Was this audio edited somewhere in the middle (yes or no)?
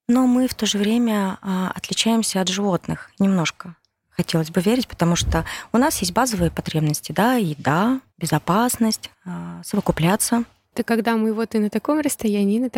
yes